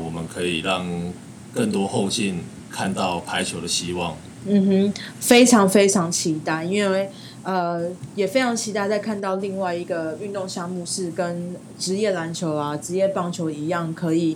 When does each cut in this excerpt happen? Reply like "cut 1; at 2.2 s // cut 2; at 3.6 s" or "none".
cut 1; at 4.4 s